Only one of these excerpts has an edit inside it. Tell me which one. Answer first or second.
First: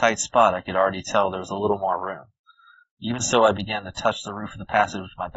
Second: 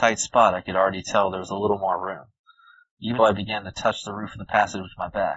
second